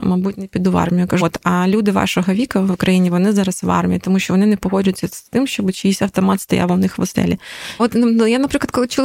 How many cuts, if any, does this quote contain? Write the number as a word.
two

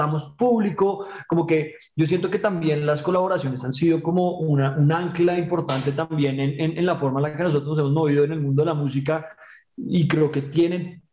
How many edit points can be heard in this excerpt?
zero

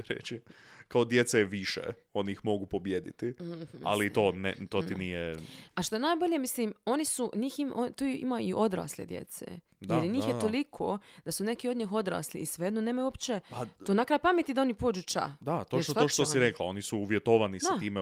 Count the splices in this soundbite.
zero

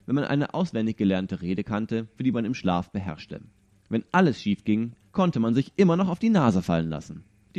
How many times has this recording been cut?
one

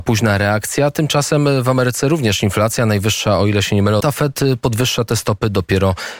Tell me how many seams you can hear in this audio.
one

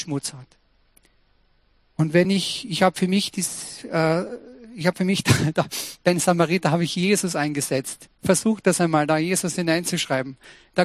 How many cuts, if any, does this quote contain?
zero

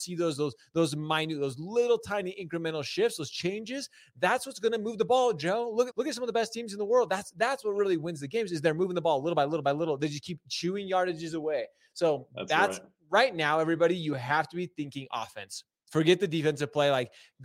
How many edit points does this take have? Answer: one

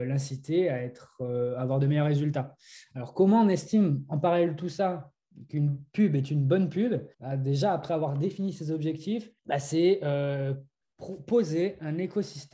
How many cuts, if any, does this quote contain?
two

